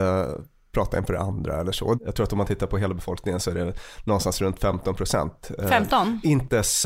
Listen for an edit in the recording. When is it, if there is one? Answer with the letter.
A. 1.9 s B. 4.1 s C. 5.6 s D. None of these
A